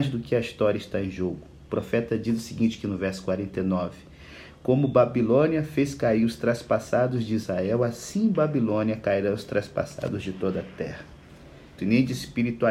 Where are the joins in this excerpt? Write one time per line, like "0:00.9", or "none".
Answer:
0:11.8